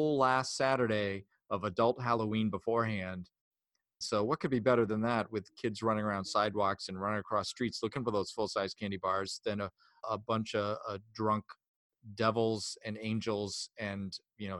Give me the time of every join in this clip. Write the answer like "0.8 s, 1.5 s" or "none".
4.0 s, 10.0 s